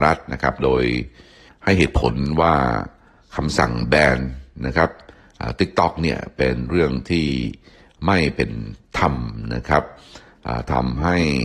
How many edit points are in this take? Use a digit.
0